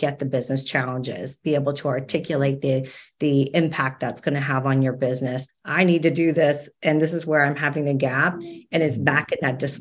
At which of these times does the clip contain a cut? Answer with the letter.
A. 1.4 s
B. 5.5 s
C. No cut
B